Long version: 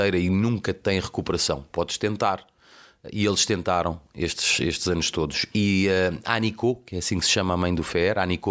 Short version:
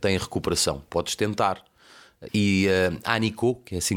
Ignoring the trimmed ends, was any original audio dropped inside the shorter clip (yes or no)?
yes